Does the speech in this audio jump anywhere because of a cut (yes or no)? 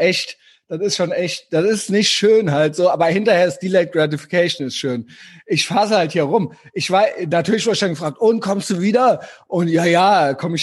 no